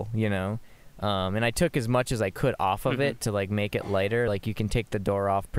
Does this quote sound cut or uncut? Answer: uncut